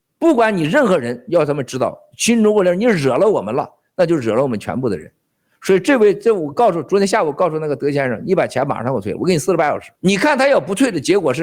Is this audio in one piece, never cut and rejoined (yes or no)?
no